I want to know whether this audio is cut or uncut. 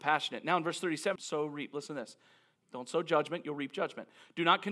cut